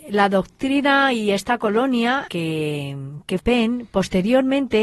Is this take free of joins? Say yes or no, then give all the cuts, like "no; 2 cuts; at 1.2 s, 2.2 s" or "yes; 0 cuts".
no; 2 cuts; at 2.3 s, 3.4 s